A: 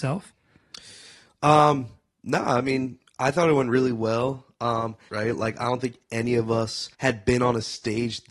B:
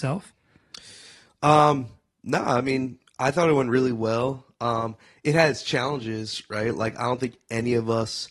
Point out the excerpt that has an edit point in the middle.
A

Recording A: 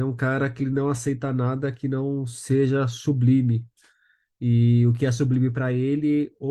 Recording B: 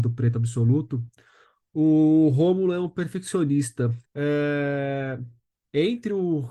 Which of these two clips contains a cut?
B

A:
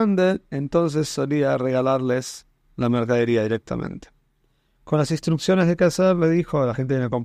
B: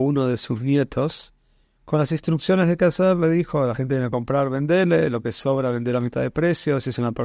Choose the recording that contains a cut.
A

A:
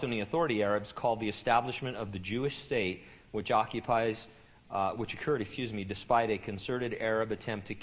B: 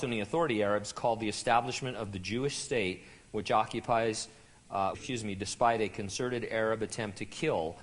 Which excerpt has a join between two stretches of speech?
B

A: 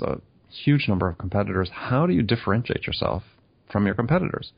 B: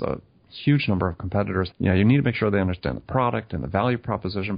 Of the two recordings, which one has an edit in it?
B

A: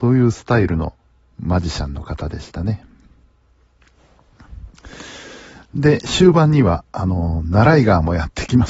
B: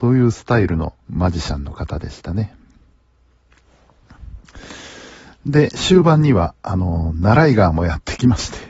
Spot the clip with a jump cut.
B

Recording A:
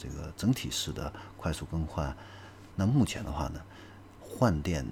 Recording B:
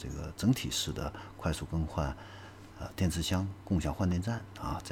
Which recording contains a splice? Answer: A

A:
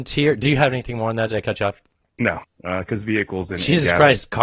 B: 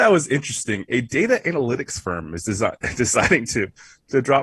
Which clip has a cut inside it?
A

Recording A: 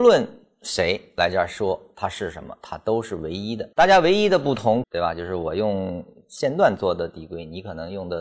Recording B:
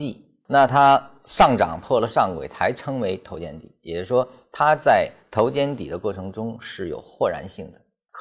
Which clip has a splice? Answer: A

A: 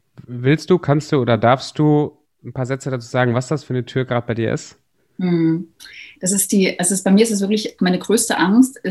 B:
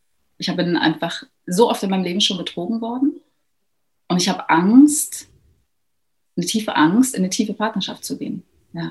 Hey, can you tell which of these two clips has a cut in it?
A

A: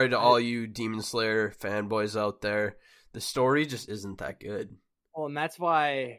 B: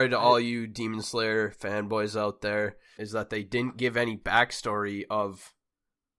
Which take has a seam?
B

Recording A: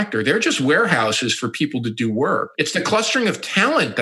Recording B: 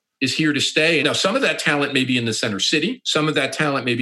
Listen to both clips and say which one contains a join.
B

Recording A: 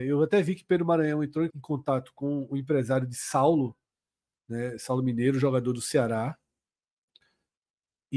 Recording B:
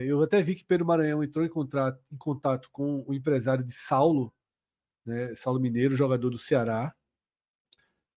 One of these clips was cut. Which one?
A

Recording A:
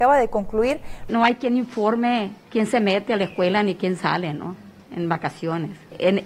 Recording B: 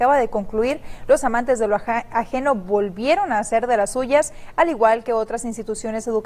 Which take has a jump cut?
A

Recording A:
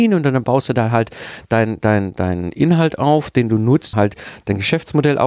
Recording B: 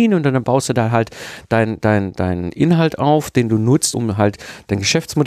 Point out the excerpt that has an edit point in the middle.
A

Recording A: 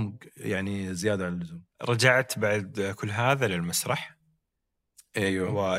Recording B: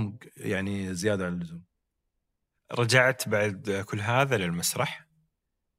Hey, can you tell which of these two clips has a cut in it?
A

